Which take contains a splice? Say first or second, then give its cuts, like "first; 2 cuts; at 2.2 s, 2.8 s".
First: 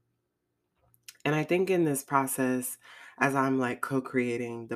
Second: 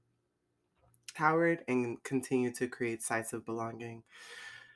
second; 1 cut; at 1.2 s